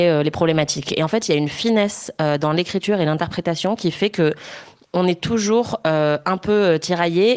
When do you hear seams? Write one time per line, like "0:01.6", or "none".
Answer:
none

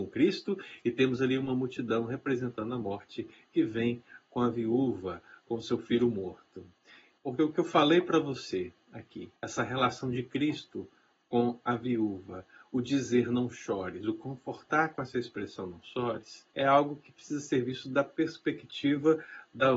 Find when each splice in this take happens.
0:07.2
0:09.4
0:16.5

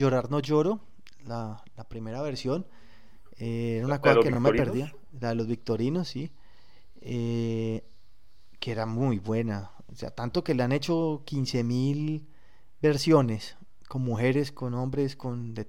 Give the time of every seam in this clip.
none

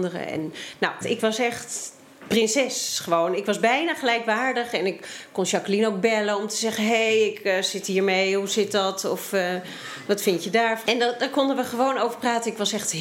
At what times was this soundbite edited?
0:01.0
0:10.8

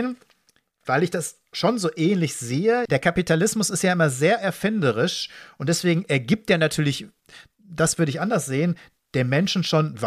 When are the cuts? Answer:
0:02.9

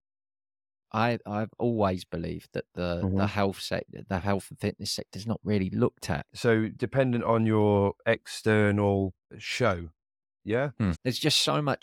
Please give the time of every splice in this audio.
0:06.3
0:09.3
0:10.9

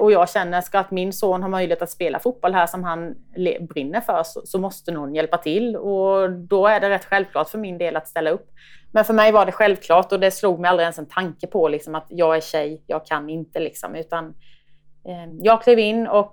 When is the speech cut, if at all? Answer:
0:08.8

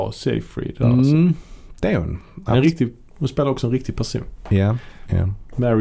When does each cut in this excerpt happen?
0:02.6

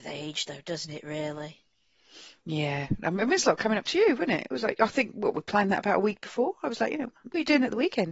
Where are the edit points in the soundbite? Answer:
none

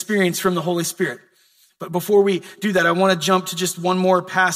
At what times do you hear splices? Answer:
none

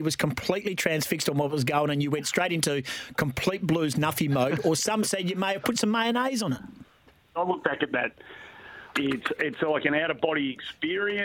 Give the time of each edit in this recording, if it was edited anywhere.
0:07.4
0:08.9

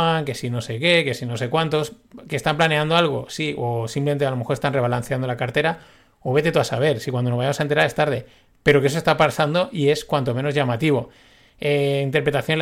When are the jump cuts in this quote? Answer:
none

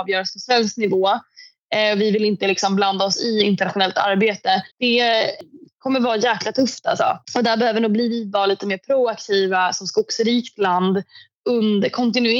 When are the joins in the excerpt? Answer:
0:04.7
0:07.2

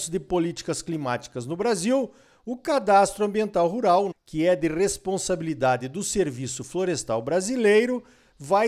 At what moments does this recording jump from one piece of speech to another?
0:04.1

